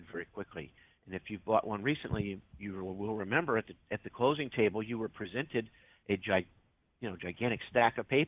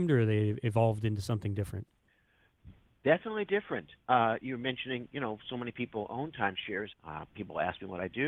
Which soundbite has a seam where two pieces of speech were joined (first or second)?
second